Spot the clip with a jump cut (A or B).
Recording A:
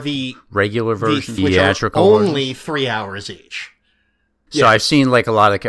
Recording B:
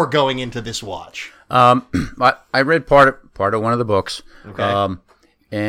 A